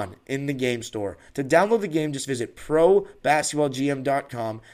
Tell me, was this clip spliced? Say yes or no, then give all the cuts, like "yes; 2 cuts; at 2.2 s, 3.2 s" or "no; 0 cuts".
yes; 1 cut; at 1.3 s